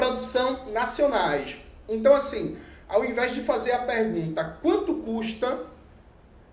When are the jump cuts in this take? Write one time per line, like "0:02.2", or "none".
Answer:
none